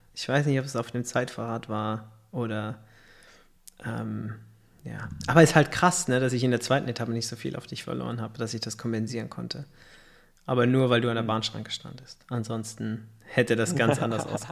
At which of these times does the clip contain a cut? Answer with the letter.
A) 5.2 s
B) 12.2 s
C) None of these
C